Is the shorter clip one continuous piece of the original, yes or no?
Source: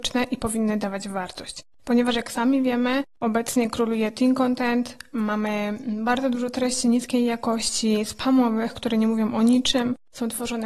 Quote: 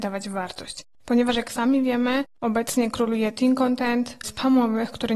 no